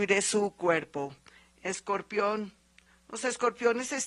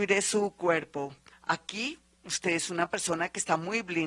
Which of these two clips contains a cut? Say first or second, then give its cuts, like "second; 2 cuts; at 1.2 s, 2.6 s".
second; 1 cut; at 1.3 s